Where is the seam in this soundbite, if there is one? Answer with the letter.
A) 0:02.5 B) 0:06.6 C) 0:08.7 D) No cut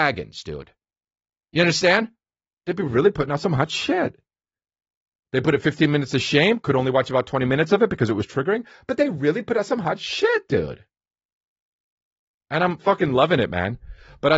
A